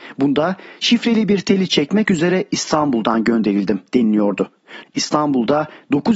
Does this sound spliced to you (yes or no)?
yes